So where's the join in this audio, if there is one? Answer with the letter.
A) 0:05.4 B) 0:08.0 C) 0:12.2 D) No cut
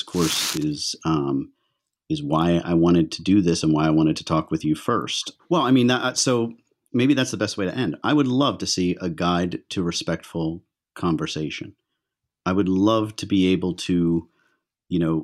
A